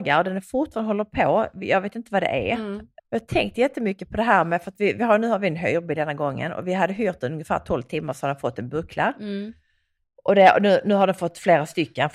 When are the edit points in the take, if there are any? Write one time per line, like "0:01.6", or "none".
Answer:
0:03.0